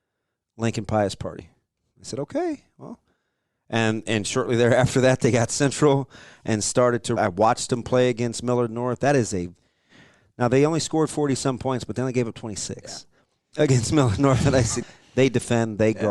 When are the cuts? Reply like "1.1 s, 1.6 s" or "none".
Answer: 7.2 s, 14.8 s